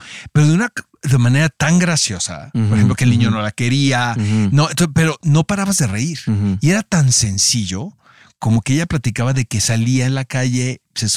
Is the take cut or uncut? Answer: uncut